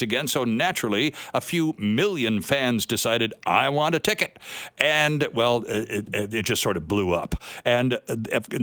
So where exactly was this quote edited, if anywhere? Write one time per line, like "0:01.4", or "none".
none